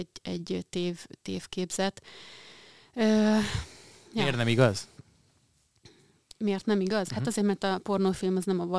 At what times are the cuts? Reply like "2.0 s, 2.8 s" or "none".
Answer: none